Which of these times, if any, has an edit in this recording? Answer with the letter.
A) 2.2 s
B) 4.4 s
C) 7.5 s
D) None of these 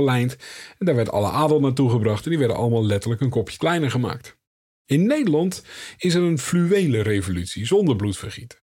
D